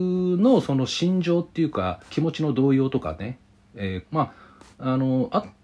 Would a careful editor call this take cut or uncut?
cut